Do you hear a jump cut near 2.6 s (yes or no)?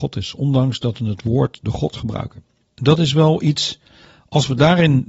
yes